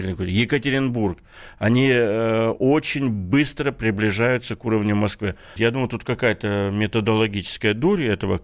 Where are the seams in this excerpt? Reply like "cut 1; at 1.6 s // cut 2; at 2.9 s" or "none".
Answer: cut 1; at 5.6 s